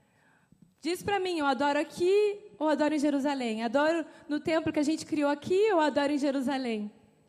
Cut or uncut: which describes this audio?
uncut